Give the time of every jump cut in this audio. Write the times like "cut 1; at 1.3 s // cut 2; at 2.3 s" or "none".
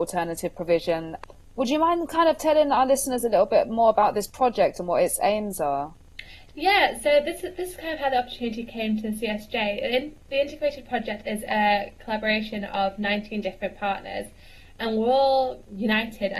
cut 1; at 14.8 s